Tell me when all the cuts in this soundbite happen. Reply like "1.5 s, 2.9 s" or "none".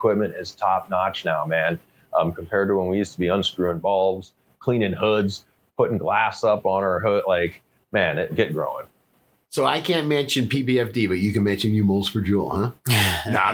8.3 s